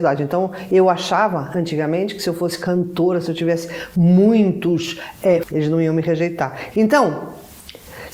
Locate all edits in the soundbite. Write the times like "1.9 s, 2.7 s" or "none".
5.4 s, 6.7 s